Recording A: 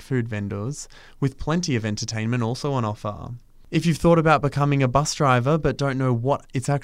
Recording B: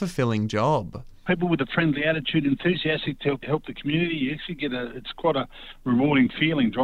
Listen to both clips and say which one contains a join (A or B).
B